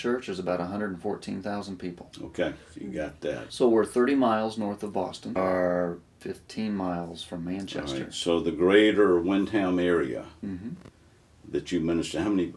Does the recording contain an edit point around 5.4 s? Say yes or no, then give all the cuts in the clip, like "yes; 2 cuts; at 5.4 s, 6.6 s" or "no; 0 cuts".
yes; 2 cuts; at 3.5 s, 5.4 s